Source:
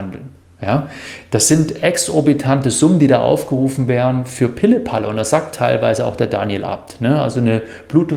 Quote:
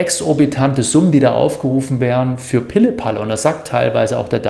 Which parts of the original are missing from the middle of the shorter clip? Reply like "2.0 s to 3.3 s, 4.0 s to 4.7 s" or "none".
none